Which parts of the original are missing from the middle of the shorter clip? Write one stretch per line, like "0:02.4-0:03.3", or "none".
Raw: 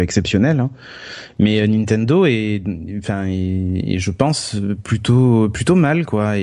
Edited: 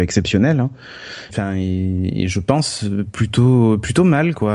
0:01.3-0:03.0